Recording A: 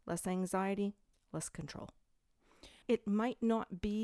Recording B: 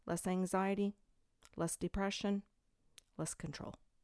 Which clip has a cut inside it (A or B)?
A